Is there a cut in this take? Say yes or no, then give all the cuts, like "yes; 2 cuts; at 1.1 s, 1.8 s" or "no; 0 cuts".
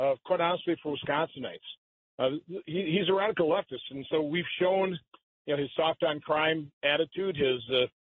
no; 0 cuts